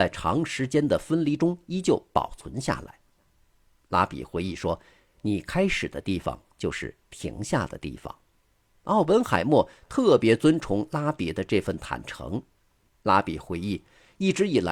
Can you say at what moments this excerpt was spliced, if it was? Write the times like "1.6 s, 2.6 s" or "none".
none